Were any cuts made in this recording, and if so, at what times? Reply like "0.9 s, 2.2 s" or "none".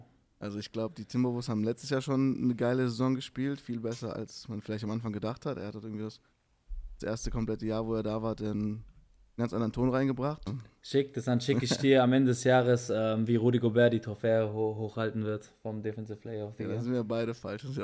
10.5 s